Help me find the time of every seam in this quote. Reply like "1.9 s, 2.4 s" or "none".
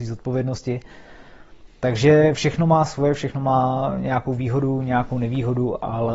none

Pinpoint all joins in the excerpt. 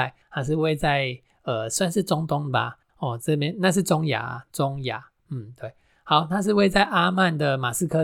2.9 s

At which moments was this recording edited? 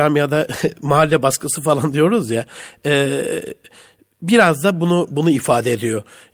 none

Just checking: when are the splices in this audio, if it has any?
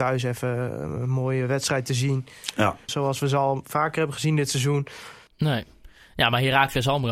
2.9 s, 5.3 s

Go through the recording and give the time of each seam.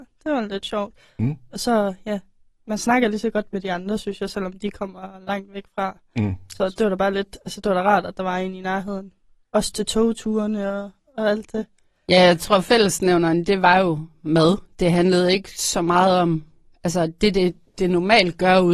none

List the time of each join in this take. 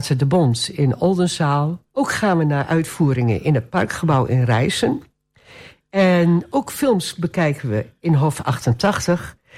1.9 s

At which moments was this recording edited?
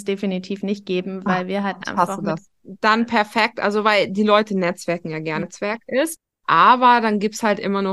2.5 s, 5.4 s

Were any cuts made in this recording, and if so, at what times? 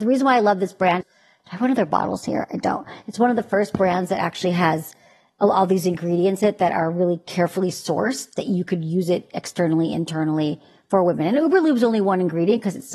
1.0 s

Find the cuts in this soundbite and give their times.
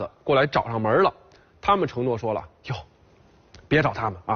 none

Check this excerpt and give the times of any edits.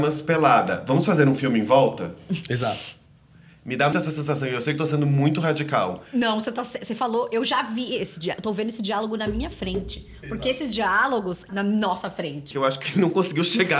3.9 s, 11.5 s, 12.5 s

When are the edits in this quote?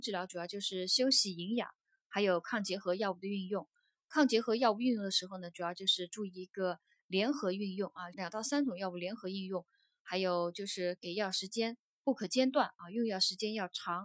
8.1 s

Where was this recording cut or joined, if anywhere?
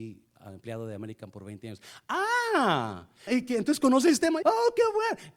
3.3 s, 4.4 s

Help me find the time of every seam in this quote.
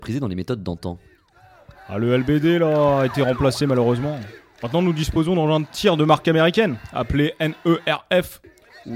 none

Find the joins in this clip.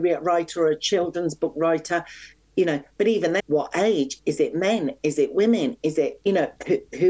3.4 s

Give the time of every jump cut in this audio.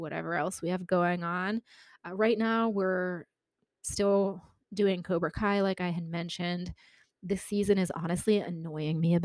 none

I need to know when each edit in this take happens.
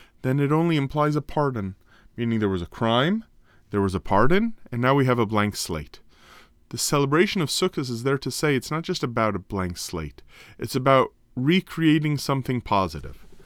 none

